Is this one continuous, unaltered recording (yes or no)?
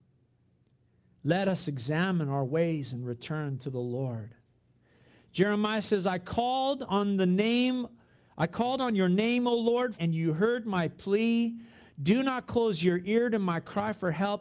no